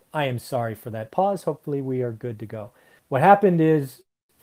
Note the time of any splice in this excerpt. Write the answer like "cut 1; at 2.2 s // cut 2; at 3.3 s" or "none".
cut 1; at 3.0 s